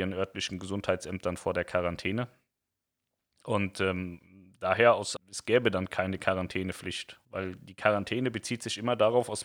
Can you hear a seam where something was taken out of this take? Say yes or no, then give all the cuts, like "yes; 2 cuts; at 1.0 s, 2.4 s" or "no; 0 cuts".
yes; 2 cuts; at 5.2 s, 7.3 s